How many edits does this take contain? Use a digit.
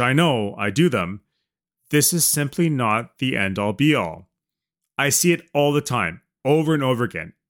0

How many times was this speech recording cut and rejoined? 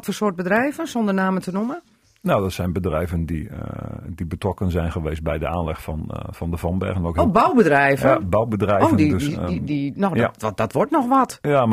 0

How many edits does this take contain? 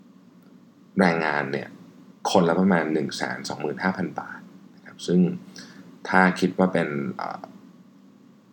0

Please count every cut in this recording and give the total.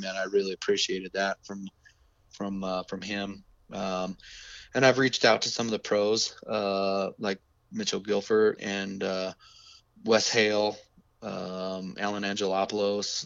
1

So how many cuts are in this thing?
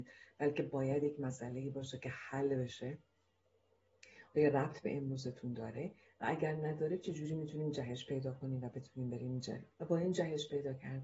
1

